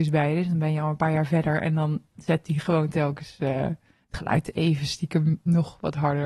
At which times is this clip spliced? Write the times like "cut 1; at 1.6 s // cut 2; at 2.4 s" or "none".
none